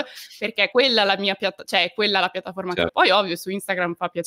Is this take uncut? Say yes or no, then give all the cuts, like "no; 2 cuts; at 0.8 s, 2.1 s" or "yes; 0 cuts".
no; 1 cut; at 2.9 s